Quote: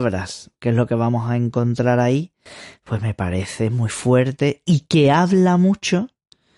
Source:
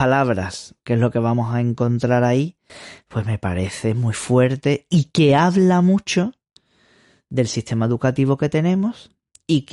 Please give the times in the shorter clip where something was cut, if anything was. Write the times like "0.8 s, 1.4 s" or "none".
none